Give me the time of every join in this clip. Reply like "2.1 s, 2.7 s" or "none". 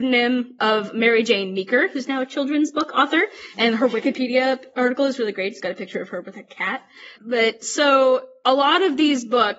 7.1 s